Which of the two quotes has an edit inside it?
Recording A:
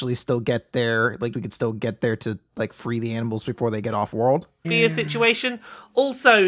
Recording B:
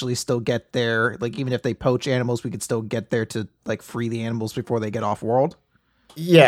A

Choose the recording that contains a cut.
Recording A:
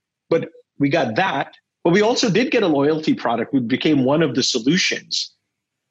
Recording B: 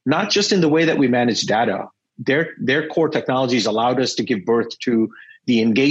A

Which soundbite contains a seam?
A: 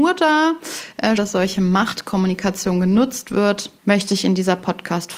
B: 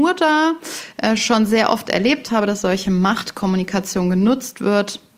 A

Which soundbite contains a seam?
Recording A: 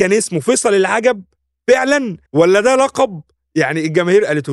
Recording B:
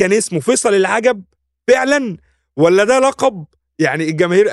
A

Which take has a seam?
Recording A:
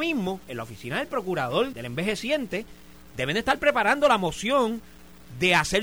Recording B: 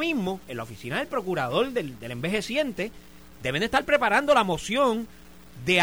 A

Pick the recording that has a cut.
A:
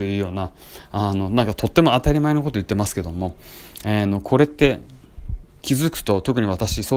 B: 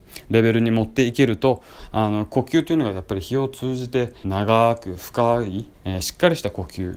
B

